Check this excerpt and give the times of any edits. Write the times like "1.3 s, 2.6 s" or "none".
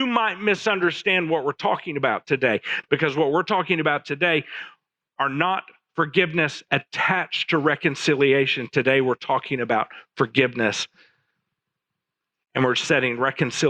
none